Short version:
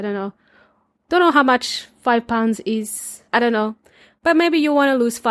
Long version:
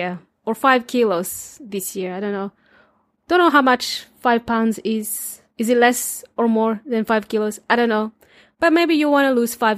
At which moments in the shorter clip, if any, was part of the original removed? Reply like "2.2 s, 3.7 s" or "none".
3.3 s

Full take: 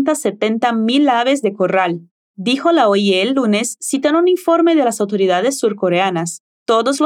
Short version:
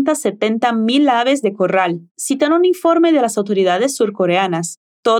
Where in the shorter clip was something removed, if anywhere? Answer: 2.1 s

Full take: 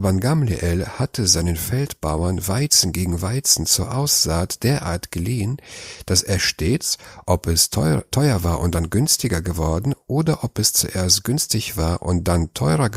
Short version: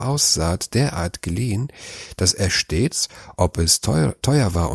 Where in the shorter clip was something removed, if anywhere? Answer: none

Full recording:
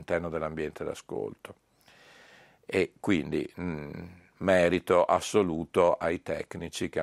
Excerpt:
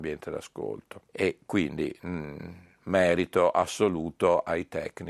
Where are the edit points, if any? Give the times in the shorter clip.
1.0 s

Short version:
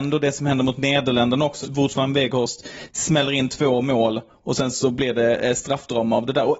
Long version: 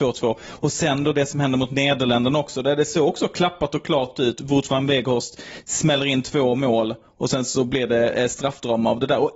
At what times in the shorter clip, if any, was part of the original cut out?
1.6 s

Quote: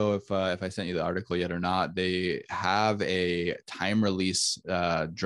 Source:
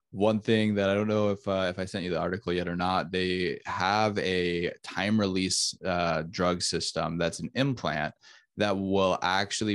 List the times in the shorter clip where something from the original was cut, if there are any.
none

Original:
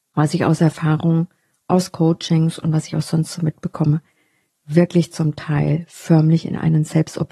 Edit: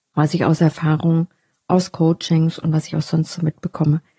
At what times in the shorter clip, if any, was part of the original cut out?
none

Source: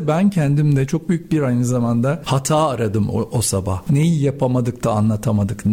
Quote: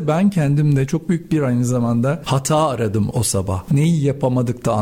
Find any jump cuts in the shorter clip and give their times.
3.1 s

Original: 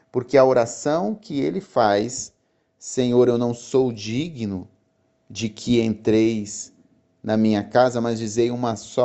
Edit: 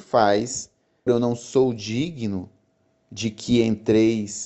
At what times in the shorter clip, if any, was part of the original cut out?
1.1 s

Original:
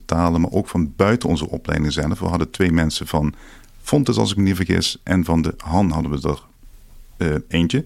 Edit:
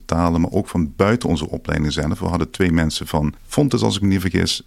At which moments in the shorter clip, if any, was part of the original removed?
3.4 s

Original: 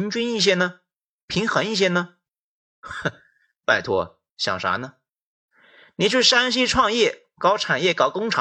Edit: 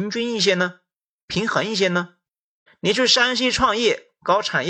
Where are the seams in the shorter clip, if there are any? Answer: 2.7 s

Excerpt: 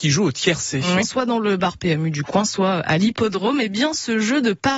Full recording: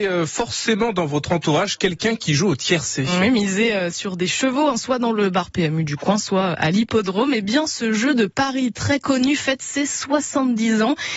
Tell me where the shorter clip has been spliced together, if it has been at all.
1.0 s

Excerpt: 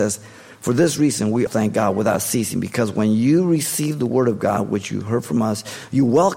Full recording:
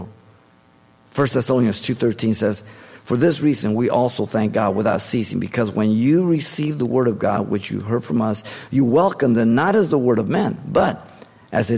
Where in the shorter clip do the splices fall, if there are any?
1.5 s

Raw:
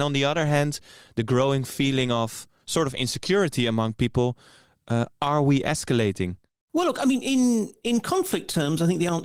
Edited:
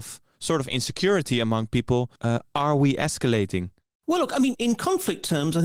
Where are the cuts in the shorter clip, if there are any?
2.2 s, 4.5 s

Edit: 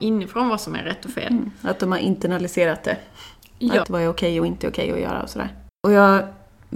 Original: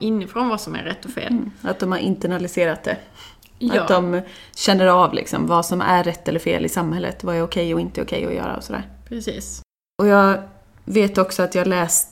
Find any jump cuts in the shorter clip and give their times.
3.8 s, 5.7 s

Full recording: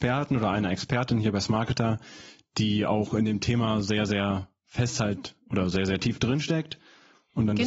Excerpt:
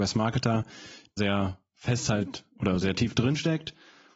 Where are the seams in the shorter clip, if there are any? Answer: 1.2 s, 2.8 s

